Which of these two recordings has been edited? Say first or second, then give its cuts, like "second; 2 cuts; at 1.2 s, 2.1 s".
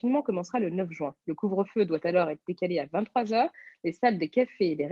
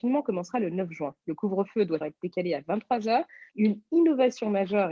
second; 2 cuts; at 2.0 s, 3.5 s